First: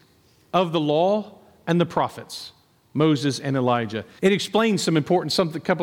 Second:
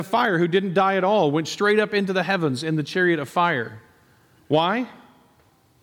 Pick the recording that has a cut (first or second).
first